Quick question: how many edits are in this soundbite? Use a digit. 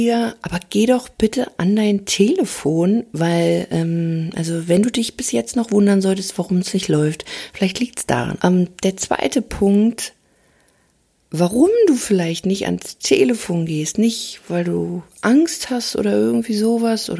1